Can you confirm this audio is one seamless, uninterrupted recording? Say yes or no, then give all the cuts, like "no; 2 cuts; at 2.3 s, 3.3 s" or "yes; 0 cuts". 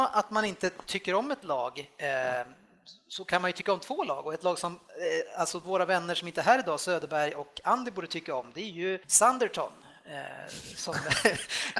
no; 1 cut; at 9.0 s